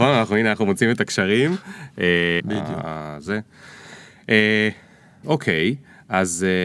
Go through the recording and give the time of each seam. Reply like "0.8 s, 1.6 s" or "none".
2.4 s, 5.2 s